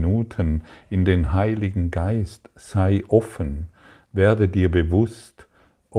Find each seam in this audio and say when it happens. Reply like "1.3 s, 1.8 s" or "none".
none